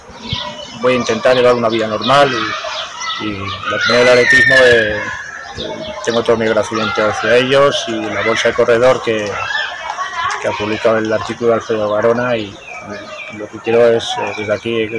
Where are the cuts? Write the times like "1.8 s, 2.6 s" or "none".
none